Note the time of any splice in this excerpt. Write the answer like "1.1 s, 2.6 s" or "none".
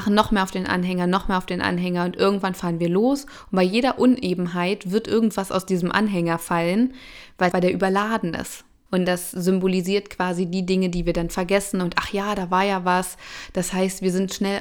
7.5 s, 8.9 s